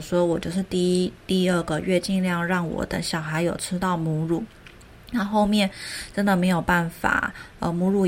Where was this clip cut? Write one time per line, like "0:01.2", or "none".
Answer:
none